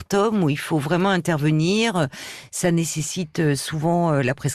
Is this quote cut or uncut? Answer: uncut